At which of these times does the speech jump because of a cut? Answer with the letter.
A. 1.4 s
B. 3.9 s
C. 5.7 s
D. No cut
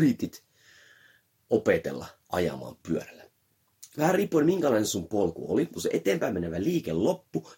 C